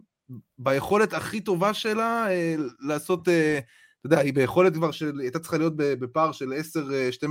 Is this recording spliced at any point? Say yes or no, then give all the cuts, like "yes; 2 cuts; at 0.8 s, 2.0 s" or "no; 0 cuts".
no; 0 cuts